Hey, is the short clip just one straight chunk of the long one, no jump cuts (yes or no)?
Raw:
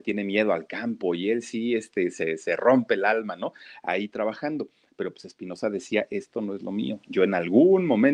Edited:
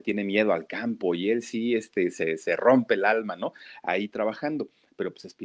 yes